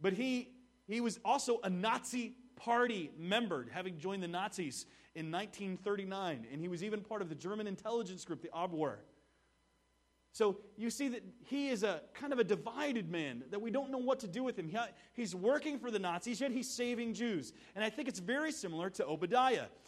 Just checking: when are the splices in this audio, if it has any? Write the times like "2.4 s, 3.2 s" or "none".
none